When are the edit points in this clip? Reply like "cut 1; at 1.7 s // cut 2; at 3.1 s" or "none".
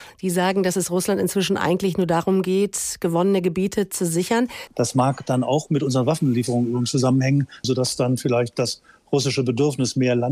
cut 1; at 4.7 s // cut 2; at 7.6 s